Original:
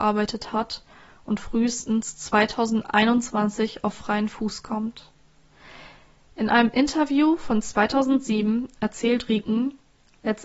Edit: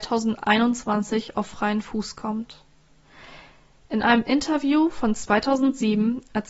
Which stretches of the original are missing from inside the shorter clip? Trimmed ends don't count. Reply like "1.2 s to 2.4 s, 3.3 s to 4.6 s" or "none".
none